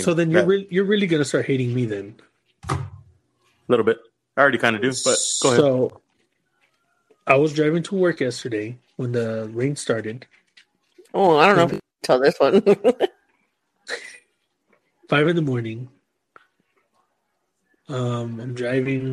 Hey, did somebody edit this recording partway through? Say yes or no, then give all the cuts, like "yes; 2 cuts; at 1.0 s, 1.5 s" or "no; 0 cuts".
no; 0 cuts